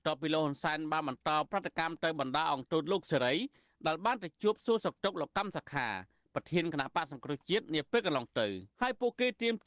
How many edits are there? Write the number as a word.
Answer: one